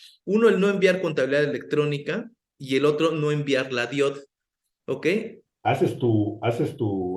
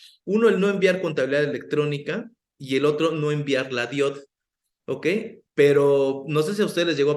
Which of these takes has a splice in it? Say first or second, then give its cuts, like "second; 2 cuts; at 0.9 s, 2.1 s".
first; 1 cut; at 5.5 s